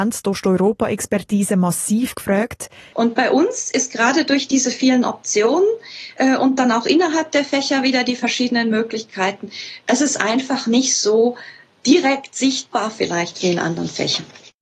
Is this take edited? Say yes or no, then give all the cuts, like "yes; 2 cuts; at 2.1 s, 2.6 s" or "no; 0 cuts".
yes; 1 cut; at 2.9 s